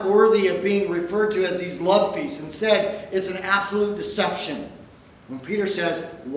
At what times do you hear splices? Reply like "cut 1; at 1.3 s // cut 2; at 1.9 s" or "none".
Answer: cut 1; at 5.2 s